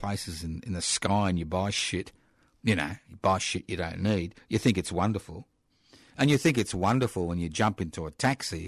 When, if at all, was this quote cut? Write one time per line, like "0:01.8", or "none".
none